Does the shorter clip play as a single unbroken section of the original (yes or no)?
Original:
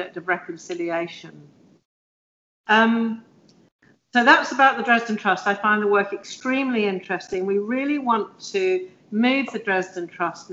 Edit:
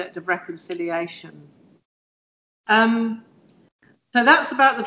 yes